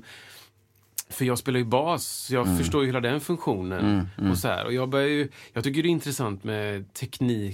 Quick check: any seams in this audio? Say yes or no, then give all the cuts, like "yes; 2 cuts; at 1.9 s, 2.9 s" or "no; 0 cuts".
no; 0 cuts